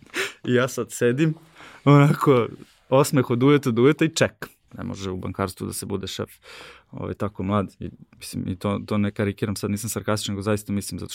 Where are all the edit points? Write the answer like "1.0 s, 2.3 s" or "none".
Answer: 4.7 s